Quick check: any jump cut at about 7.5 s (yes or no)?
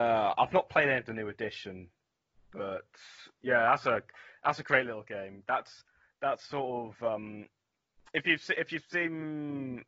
no